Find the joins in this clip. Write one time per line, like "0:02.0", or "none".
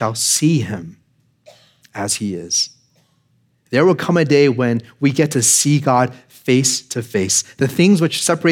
none